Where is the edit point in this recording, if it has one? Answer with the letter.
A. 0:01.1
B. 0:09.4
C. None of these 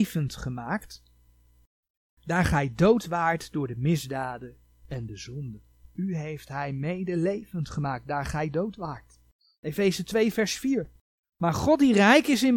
C